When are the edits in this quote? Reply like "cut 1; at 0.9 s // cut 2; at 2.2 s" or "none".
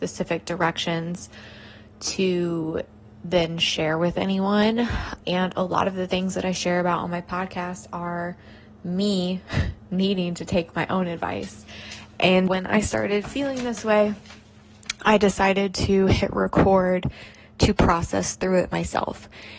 cut 1; at 5.2 s // cut 2; at 12.5 s